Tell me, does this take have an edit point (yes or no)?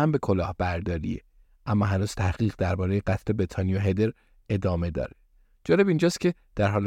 no